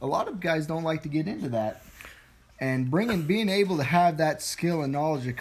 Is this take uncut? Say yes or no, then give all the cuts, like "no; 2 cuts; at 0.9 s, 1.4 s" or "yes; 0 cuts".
yes; 0 cuts